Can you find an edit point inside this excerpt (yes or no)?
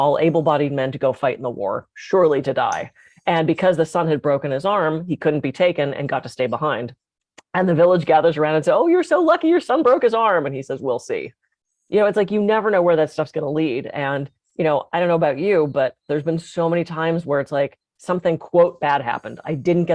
no